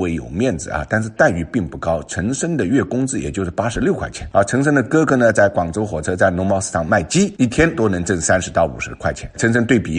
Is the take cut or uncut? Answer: uncut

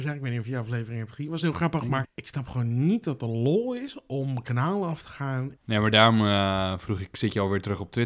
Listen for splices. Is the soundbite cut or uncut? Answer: cut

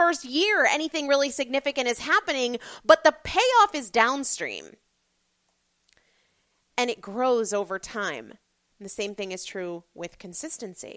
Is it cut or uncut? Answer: uncut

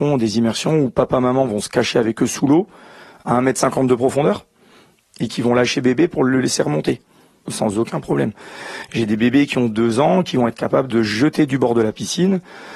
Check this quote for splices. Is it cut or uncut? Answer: uncut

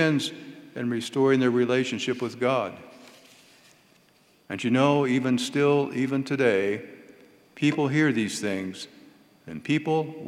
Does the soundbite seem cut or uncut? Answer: uncut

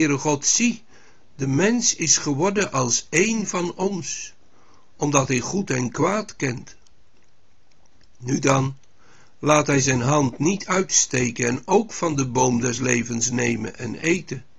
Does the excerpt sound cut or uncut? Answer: uncut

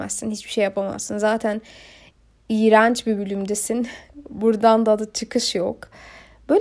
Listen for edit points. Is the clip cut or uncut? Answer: uncut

